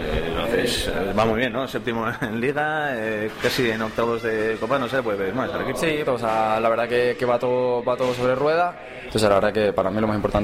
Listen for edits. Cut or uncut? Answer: cut